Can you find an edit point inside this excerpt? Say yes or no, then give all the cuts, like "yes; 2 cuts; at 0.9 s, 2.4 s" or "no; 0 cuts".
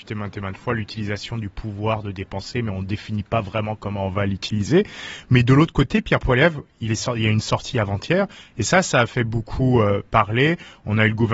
no; 0 cuts